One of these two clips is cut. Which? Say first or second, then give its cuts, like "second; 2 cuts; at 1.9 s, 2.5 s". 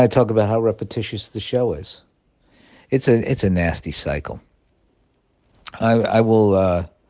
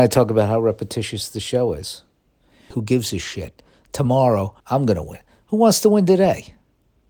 second; 2 cuts; at 2.7 s, 4.6 s